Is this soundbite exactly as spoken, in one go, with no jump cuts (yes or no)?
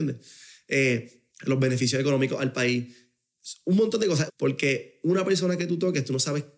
no